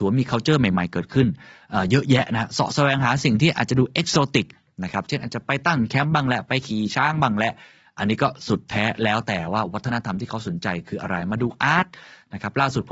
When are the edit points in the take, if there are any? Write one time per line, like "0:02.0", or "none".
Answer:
none